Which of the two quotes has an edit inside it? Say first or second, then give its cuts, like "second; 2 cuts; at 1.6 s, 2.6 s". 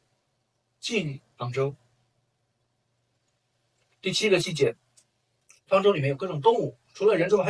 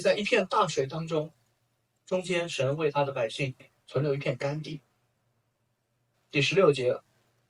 second; 1 cut; at 6.1 s